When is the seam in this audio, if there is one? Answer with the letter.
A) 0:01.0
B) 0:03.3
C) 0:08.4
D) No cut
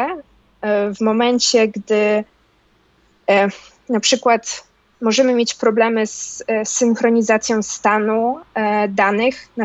D